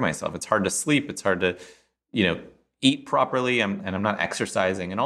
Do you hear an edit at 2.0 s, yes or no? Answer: no